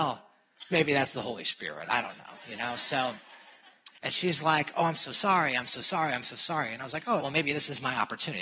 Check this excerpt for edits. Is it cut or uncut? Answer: cut